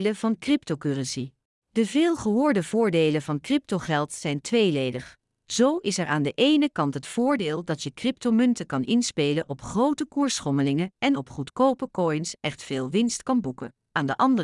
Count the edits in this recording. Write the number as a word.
one